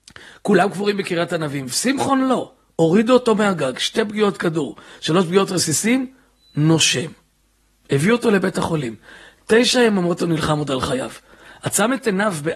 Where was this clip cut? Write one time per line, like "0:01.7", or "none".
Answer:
none

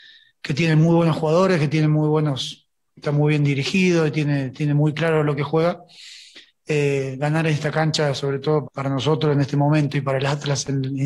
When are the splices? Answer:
0:08.6

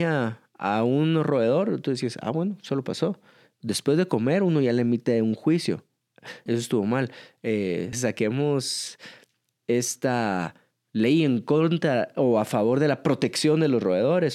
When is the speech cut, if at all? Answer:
0:06.5
0:07.9

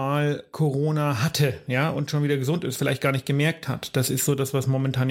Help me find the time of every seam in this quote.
none

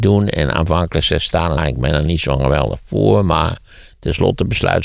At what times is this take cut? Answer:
0:01.6

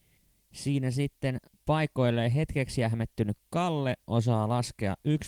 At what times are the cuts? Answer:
none

